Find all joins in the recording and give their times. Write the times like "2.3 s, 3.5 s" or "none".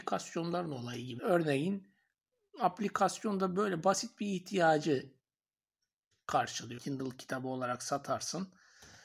1.2 s, 6.8 s

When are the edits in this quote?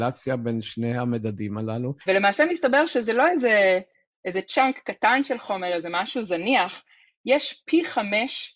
2.1 s

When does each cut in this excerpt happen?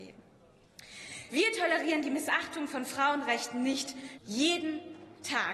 1.3 s, 4.2 s

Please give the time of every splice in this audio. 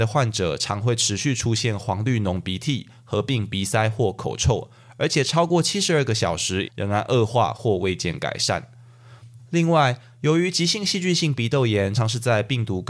6.6 s, 9.4 s, 11.9 s

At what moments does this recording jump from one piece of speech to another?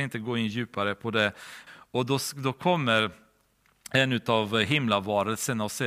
1.7 s

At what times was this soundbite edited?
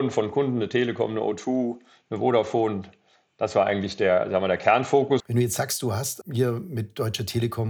5.2 s, 6.2 s

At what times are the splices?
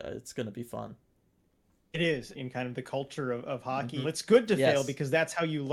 2.3 s, 4.0 s

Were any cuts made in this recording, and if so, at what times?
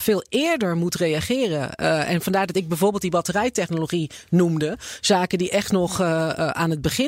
none

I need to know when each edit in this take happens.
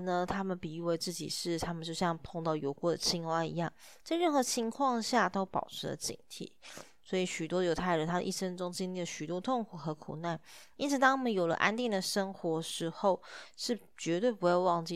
4.0 s

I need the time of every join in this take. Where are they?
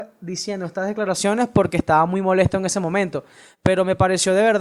none

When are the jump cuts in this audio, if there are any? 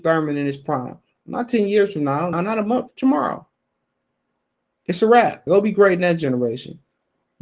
2.3 s, 5.5 s

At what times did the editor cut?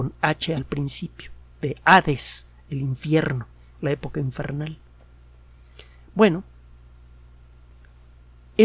none

